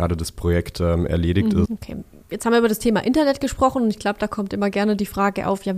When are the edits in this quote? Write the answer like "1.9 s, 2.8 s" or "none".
1.6 s